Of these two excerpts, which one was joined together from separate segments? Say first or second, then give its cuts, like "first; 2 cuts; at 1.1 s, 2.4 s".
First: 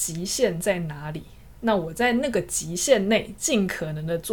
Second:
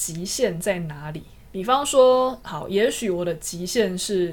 second; 1 cut; at 1.5 s